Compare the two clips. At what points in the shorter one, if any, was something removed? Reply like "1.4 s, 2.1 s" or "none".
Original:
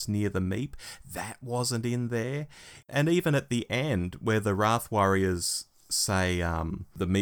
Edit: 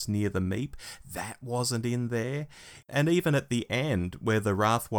none